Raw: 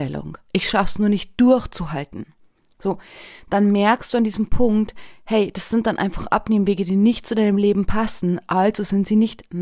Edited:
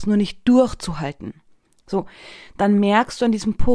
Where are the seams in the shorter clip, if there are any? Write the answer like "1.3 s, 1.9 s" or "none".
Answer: none